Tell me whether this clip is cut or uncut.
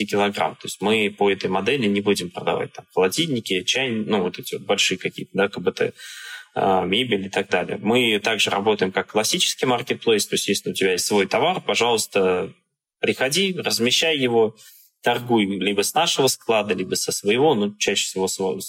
uncut